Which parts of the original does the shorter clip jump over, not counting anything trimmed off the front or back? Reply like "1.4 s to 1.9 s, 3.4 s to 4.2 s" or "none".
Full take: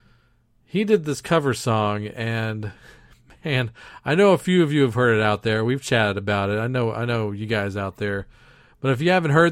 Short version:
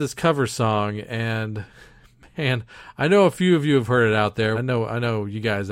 5.6 s to 6.6 s

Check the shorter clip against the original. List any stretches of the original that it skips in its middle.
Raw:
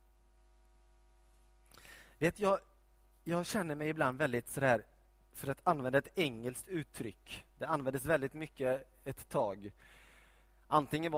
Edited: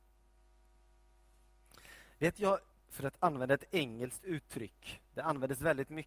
2.7 s to 5.2 s

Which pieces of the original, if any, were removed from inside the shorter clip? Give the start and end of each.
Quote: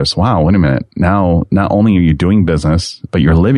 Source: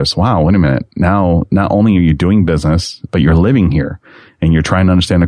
none

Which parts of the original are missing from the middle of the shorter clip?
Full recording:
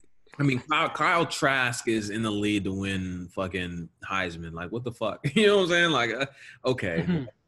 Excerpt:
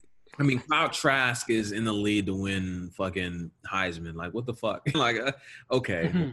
0.9 s to 1.3 s, 5.3 s to 5.9 s

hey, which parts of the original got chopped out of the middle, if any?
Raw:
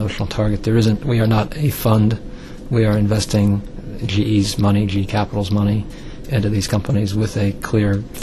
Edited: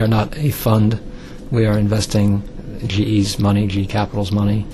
none

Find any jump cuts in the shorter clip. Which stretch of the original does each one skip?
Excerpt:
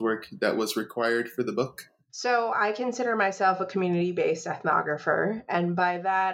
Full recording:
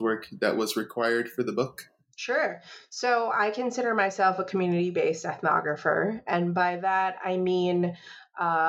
2.1 s to 2.9 s

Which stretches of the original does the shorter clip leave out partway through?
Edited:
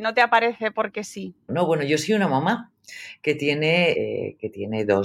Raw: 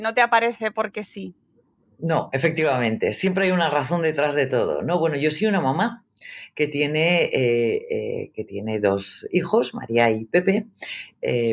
1.5 s to 4.8 s, 7.3 s to 7.9 s

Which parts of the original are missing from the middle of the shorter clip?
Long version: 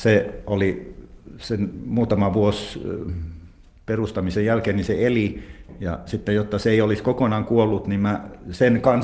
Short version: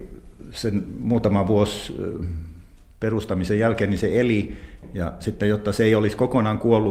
none

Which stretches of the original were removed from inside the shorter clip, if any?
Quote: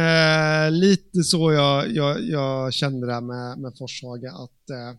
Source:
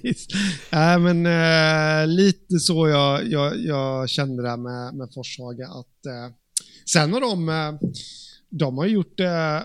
none

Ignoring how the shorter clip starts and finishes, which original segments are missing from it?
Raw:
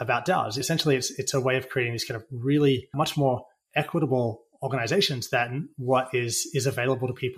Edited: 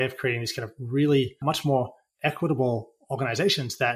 none

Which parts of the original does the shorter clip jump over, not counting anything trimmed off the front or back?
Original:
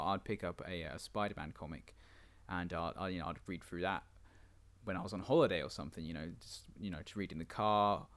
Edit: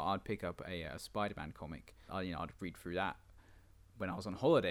2.1 s to 2.9 s

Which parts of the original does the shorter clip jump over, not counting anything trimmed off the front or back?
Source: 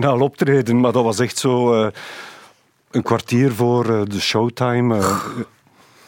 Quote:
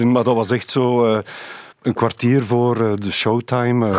2.4 s to 2.8 s

